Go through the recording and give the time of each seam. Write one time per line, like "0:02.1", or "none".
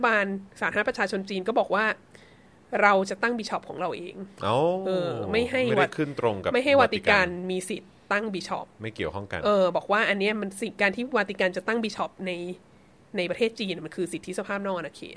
none

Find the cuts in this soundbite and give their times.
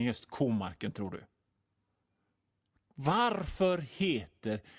none

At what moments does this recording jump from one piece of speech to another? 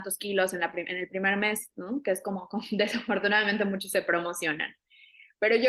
none

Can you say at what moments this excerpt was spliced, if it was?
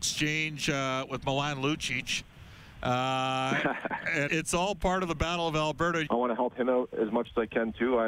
0:04.3
0:06.1

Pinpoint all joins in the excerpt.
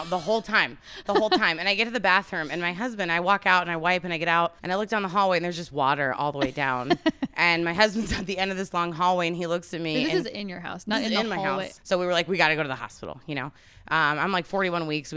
0:04.6
0:11.8

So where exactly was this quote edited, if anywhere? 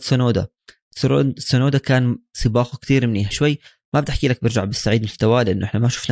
0:03.3

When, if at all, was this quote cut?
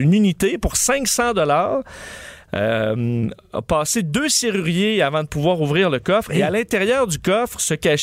0:02.5

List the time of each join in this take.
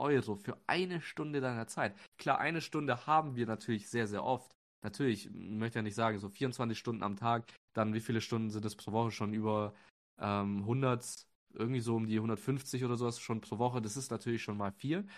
none

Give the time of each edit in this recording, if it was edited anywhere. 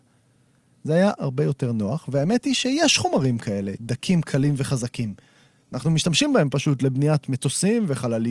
0:01.2

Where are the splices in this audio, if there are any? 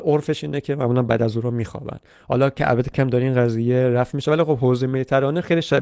0:02.9

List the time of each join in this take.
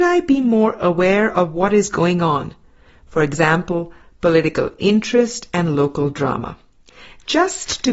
none

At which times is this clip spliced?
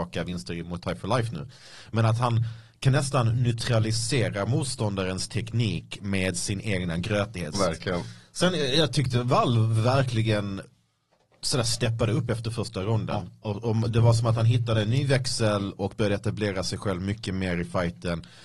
0:07.5

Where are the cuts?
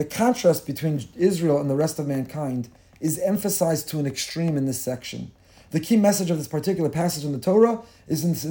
none

